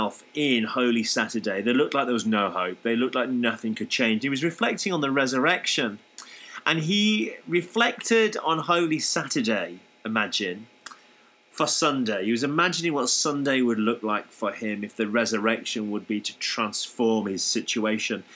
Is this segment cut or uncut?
uncut